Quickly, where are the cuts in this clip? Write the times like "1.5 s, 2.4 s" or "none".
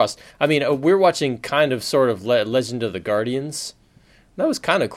none